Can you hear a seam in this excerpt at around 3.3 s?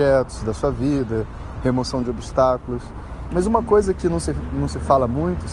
yes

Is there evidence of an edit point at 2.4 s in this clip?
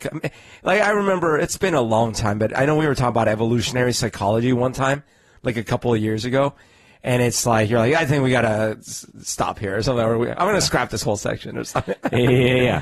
no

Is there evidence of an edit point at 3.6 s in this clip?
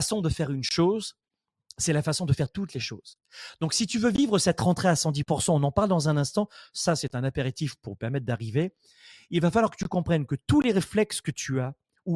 no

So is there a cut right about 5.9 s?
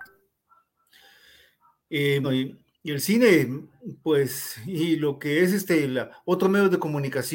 no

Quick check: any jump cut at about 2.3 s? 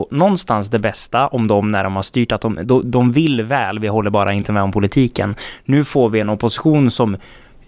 no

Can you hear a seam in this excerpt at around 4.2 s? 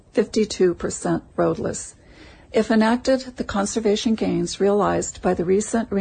no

